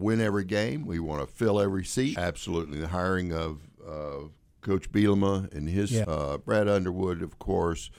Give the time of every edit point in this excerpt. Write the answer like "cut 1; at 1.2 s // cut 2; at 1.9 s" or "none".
cut 1; at 2.2 s // cut 2; at 6.0 s